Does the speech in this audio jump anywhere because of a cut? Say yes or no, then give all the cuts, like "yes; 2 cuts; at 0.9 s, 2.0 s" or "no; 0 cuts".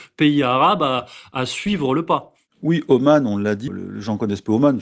yes; 1 cut; at 3.7 s